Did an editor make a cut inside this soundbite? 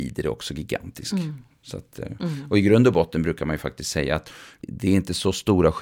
no; 0 cuts

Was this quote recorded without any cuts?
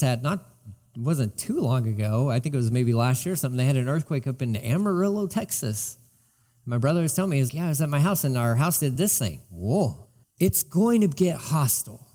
no; 2 cuts; at 7.5 s, 10.2 s

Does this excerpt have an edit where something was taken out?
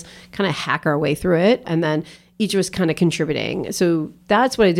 yes; 1 cut; at 1.6 s

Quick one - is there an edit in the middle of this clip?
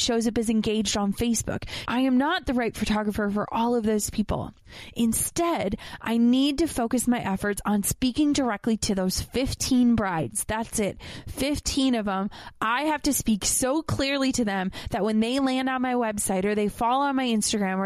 yes; 1 cut; at 1.9 s

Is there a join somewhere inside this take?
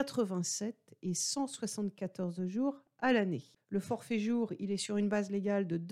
yes; 1 cut; at 3.6 s

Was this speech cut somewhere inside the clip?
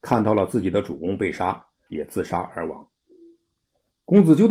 yes; 1 cut; at 1.9 s

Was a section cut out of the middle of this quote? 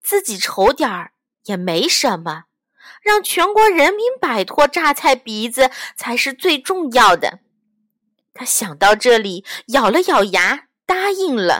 no; 0 cuts

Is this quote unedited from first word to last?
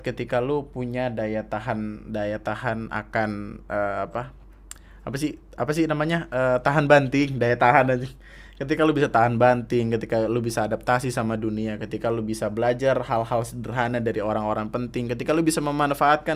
yes; 0 cuts

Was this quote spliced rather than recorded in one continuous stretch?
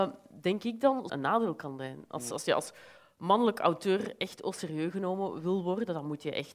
yes; 1 cut; at 1.1 s

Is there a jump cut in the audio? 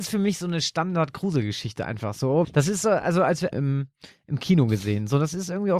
yes; 2 cuts; at 2.4 s, 3.5 s

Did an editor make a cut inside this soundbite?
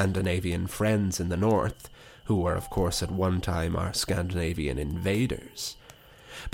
no; 0 cuts

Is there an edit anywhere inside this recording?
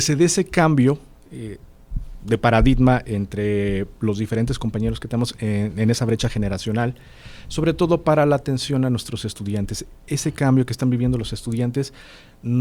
no; 0 cuts

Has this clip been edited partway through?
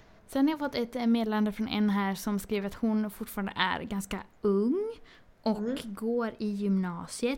no; 0 cuts

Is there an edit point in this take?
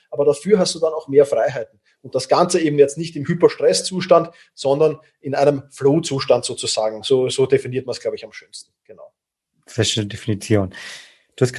no; 0 cuts

